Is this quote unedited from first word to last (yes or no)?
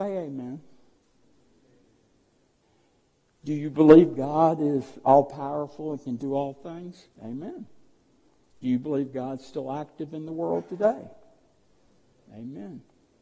no